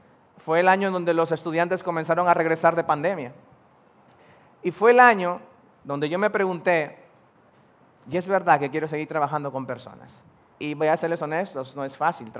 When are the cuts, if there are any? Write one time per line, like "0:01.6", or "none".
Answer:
0:10.5

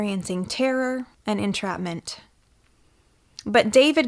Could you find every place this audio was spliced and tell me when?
0:01.1

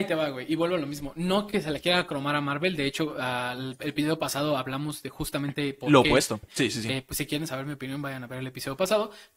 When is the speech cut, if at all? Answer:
0:06.5

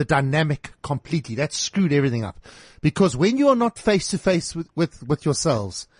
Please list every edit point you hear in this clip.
none

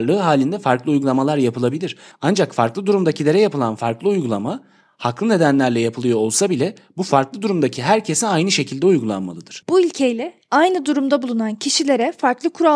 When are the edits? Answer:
0:09.6

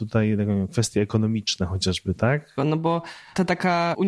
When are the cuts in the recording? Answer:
0:02.6

